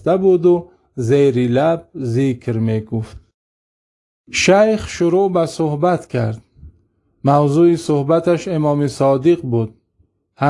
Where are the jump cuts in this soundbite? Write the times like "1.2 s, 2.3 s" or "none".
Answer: none